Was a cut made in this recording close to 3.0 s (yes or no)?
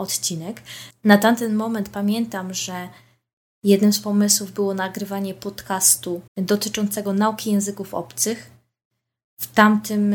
no